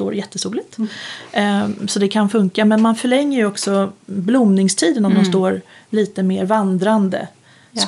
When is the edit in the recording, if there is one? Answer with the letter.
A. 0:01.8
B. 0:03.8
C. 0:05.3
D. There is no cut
D